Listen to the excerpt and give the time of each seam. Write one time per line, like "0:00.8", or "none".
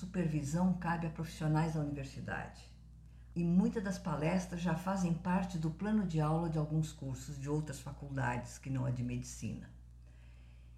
0:03.3